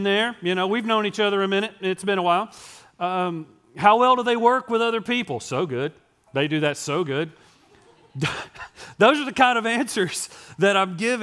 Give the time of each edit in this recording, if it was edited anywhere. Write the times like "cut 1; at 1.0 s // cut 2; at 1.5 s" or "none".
none